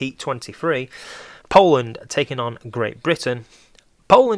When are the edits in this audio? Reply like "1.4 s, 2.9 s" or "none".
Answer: 1.4 s

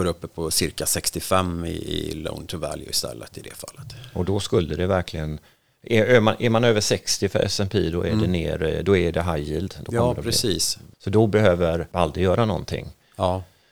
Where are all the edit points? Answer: 10.9 s

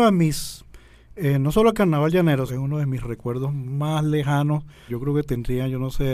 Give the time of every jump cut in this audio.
2.5 s, 4.9 s

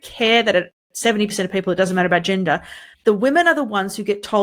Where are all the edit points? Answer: 2.9 s

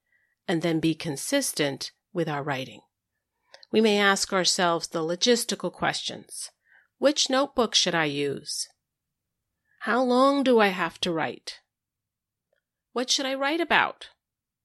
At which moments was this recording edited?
none

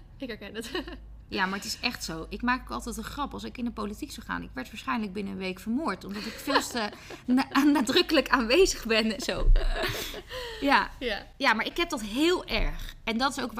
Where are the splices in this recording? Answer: none

